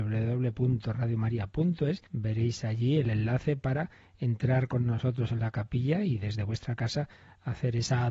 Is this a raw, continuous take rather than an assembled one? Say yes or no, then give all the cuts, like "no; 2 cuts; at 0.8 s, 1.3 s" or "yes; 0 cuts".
no; 1 cut; at 2.1 s